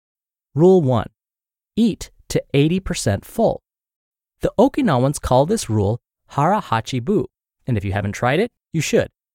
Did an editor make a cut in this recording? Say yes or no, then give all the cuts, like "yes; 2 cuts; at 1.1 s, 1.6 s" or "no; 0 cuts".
no; 0 cuts